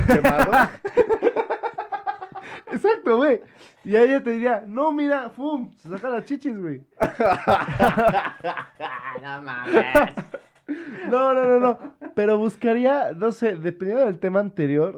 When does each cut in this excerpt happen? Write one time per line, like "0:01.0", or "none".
none